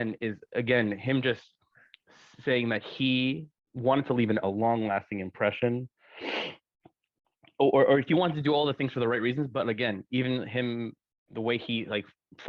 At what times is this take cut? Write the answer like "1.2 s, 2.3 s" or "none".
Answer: none